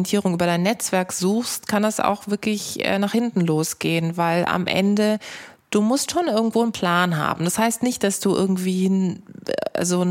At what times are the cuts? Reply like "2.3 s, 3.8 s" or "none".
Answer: none